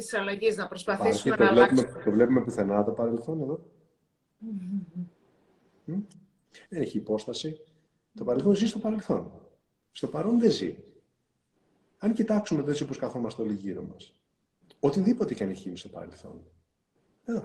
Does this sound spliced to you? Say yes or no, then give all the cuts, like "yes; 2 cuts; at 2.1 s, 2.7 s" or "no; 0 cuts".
yes; 1 cut; at 6.6 s